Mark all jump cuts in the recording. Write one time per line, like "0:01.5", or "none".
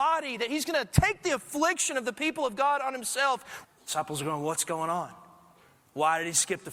0:03.6